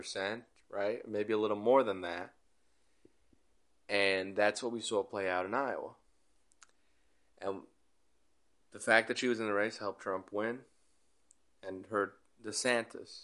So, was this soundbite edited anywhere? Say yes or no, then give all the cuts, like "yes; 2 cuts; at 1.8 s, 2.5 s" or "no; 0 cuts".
no; 0 cuts